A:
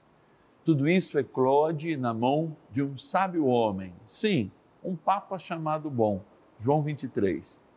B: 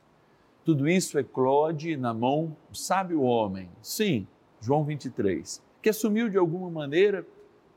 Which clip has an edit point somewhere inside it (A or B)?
B